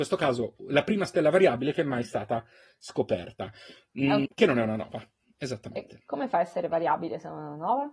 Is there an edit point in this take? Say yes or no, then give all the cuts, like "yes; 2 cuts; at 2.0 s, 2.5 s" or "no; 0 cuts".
yes; 1 cut; at 4.2 s